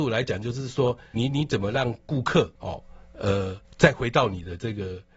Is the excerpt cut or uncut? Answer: cut